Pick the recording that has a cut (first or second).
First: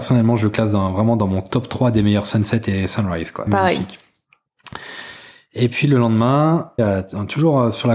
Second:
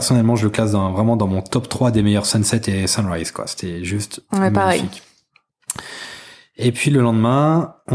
first